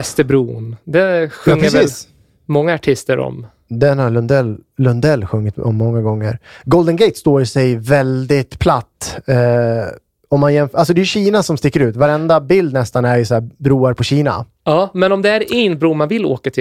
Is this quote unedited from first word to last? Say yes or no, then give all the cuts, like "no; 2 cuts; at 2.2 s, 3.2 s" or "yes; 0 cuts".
yes; 0 cuts